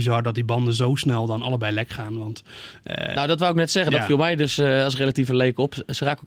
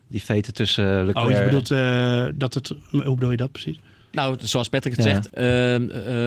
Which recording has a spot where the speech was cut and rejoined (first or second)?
second